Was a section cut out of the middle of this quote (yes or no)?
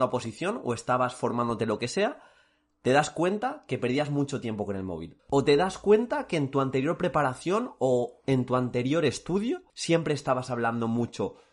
yes